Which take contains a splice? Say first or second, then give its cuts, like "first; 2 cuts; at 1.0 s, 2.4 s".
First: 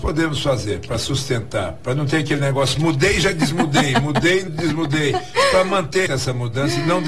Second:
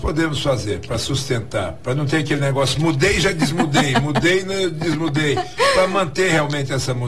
first; 2 cuts; at 4.5 s, 6.1 s